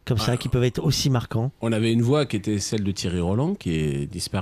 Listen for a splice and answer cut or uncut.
uncut